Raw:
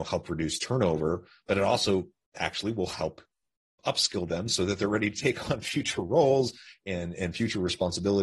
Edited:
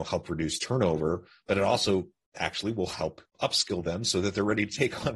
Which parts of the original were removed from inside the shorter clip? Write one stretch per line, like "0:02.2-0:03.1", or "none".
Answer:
0:03.3-0:03.7